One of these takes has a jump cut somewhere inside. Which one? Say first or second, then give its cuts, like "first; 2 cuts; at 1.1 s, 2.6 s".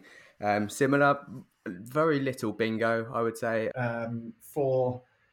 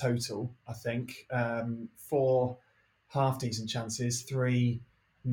first; 1 cut; at 3.7 s